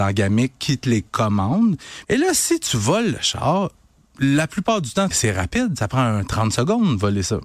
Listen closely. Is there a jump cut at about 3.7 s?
no; 2 cuts; at 2.0 s, 5.1 s

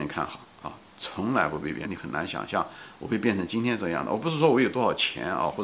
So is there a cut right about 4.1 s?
no; 1 cut; at 1.8 s

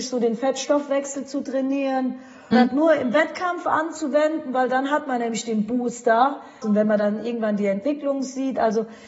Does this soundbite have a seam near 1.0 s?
no; 2 cuts; at 2.5 s, 6.6 s

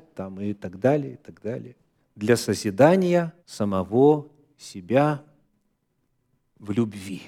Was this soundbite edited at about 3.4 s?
yes; 2 cuts; at 2.0 s, 3.4 s

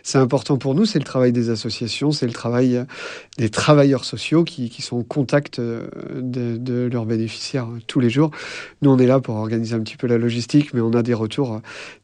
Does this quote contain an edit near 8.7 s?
no; 0 cuts

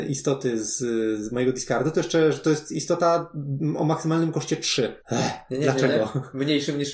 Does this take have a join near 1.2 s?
no; 1 cut; at 5.0 s

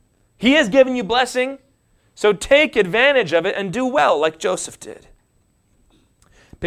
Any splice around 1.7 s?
no; 0 cuts

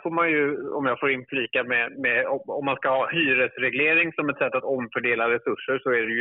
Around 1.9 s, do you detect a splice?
no; 0 cuts

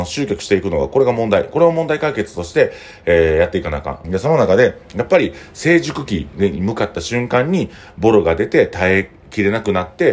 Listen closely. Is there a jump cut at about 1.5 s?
no; 1 cut; at 4.0 s

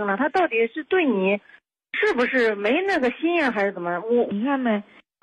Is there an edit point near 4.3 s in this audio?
yes; 1 cut; at 4.3 s

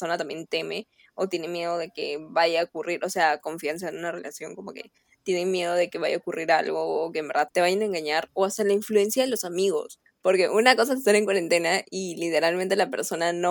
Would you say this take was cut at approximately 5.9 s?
no; 3 cuts; at 3.4 s, 7.5 s, 10.1 s

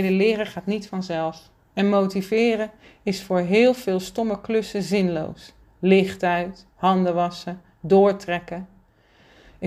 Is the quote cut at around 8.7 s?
no; 0 cuts

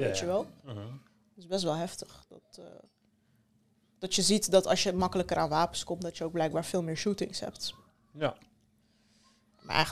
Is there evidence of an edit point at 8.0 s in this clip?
no; 0 cuts

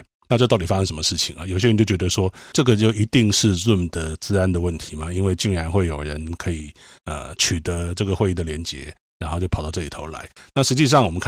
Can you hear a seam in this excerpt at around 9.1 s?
no; 1 cut; at 2.5 s

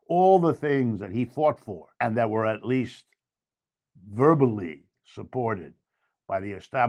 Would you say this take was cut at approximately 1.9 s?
yes; 1 cut; at 1.9 s

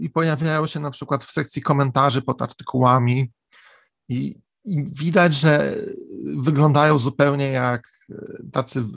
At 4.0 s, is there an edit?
no; 0 cuts

